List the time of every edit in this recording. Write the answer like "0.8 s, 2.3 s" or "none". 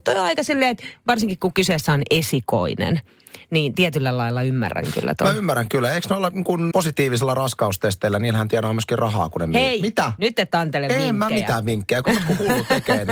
6.7 s